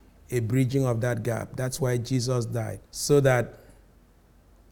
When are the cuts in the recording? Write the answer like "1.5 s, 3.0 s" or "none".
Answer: 2.9 s